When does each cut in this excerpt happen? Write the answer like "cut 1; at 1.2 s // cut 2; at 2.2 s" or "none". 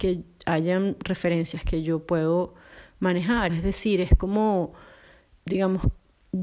cut 1; at 3.5 s // cut 2; at 5.4 s